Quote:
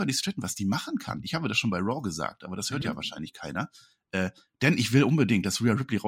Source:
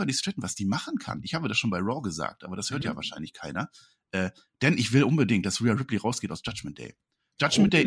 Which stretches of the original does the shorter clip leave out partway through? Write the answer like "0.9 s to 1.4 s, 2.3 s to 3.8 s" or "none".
none